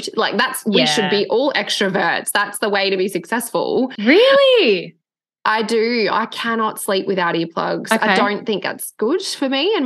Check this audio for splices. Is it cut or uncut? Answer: cut